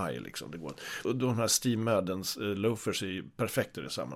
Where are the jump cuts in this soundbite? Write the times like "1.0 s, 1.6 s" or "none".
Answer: 1.0 s